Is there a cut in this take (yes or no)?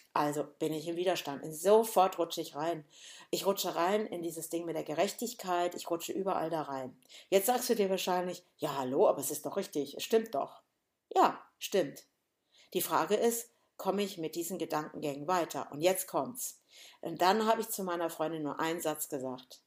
no